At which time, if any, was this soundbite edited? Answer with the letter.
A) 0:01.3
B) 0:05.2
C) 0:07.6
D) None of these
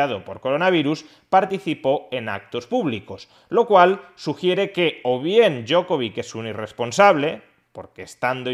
D